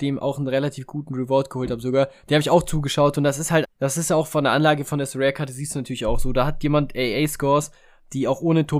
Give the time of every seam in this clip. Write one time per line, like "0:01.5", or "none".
0:03.6